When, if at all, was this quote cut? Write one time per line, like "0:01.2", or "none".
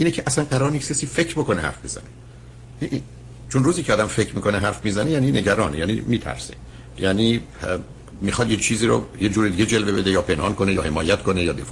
0:03.4